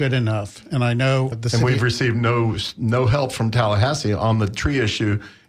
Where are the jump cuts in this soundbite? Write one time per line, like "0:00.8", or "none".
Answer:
0:01.3